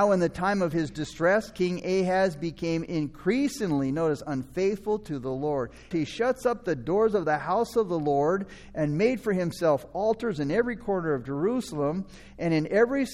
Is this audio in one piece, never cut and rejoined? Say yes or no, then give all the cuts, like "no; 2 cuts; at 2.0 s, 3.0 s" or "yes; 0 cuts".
no; 1 cut; at 5.9 s